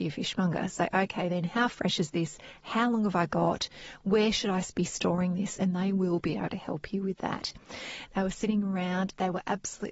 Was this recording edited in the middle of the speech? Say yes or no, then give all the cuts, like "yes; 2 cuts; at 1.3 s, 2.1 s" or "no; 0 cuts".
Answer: yes; 1 cut; at 8.1 s